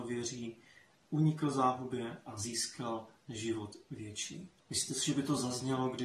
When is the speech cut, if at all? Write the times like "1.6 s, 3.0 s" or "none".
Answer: 4.6 s